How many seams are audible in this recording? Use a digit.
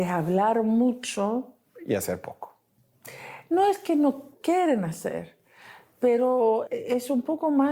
2